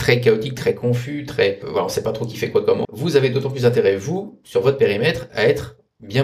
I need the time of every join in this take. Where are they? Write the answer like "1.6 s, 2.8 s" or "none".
2.8 s